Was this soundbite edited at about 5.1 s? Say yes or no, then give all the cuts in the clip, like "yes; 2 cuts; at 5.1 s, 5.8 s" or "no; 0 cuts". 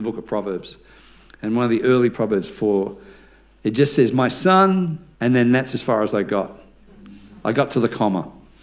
yes; 2 cuts; at 2.1 s, 5.1 s